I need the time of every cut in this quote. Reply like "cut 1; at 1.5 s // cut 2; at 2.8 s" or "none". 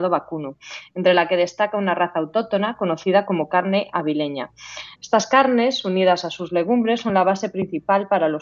cut 1; at 4.9 s